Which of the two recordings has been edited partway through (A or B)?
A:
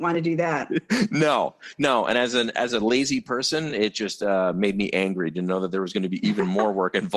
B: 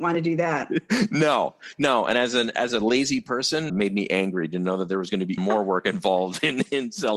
B